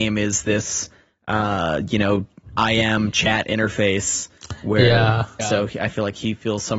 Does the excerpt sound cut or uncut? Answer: cut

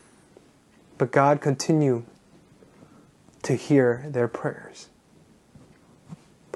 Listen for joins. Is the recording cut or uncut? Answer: uncut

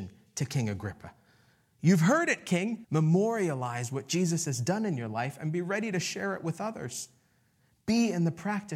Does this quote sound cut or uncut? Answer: cut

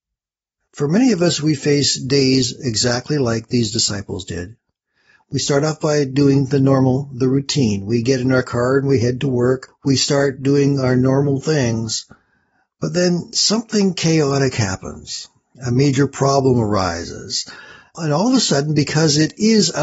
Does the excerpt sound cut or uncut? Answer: uncut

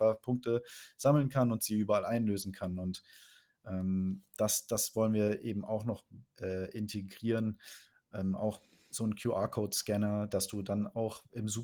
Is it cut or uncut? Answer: uncut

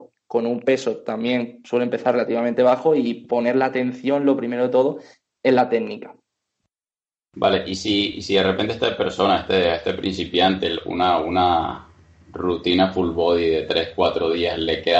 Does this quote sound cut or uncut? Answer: uncut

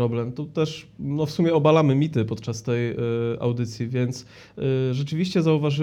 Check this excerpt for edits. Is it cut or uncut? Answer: uncut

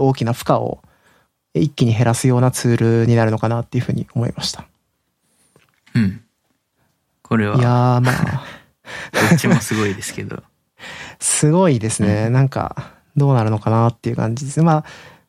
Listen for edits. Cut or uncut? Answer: uncut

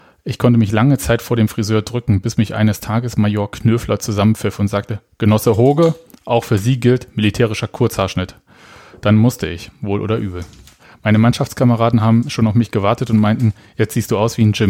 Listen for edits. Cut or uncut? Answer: uncut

